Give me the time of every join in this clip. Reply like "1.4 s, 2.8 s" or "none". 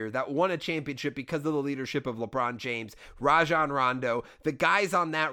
none